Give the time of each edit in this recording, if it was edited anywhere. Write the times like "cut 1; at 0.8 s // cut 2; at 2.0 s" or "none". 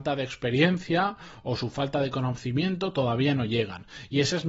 none